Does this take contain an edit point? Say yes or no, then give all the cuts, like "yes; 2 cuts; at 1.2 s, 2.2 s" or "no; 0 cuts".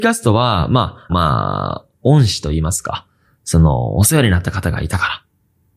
yes; 1 cut; at 1.1 s